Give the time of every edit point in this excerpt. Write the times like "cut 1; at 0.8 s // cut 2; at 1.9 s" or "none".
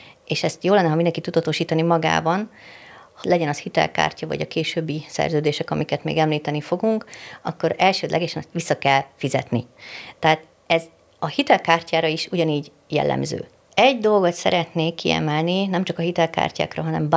cut 1; at 3.2 s // cut 2; at 13.5 s